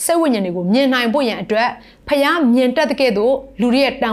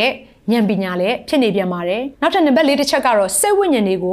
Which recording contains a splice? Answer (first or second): second